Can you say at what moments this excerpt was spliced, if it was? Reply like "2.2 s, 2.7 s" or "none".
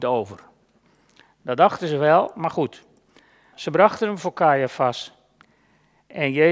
3.5 s